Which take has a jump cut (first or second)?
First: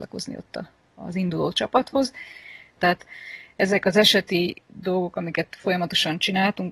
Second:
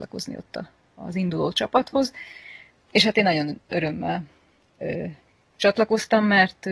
first